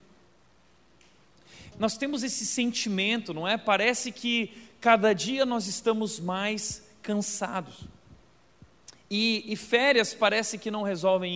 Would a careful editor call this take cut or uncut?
cut